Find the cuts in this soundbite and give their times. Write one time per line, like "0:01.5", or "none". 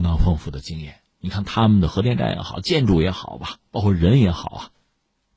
none